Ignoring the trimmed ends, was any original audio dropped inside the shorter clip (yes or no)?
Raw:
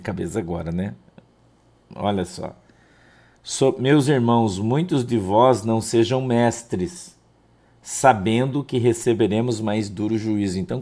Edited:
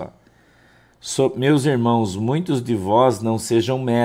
no